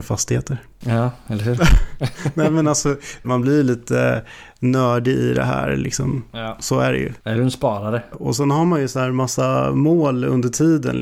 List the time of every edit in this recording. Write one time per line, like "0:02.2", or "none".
0:03.2
0:08.1